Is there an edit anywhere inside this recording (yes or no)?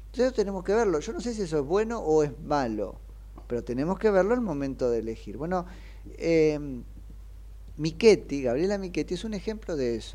no